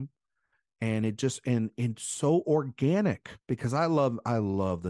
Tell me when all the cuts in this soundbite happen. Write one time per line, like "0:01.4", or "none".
0:03.4